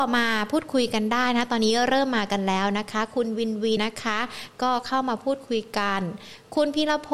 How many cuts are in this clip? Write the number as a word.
one